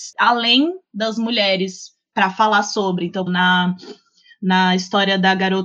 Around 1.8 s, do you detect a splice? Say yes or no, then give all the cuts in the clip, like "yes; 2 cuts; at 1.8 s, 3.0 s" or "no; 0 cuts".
no; 1 cut; at 3.3 s